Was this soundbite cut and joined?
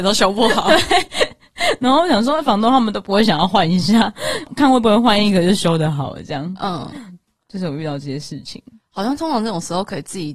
no; 0 cuts

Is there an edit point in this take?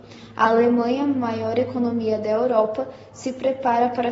no; 0 cuts

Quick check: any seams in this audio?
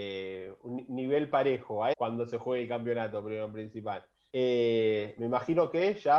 yes; 2 cuts; at 1.9 s, 4.3 s

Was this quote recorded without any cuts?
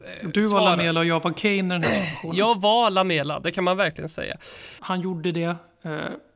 no; 1 cut; at 4.8 s

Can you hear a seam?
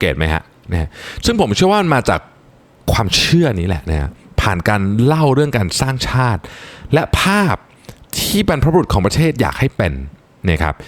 no; 0 cuts

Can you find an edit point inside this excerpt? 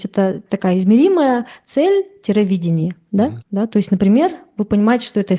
yes; 1 cut; at 3.4 s

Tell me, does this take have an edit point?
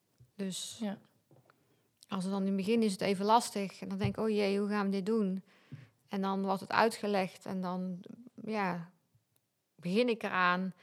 no; 0 cuts

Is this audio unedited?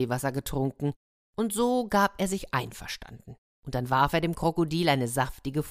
no; 1 cut; at 3.5 s

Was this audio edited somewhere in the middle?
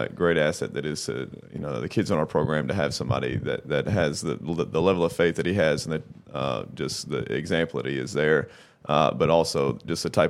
no; 0 cuts

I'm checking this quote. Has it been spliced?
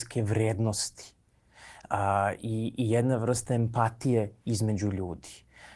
no; 0 cuts

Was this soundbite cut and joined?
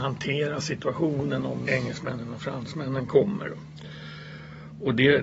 yes; 1 cut; at 1.7 s

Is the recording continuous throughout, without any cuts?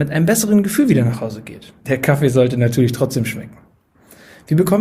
yes; 0 cuts

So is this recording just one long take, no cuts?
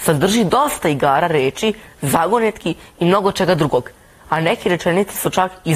yes; 0 cuts

